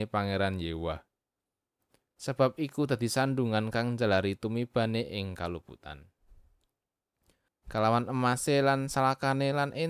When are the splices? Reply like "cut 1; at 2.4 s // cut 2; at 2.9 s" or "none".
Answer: cut 1; at 2.1 s // cut 2; at 7.5 s